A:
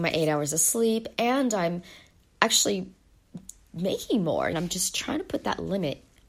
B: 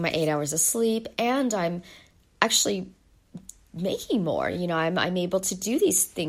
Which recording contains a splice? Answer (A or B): A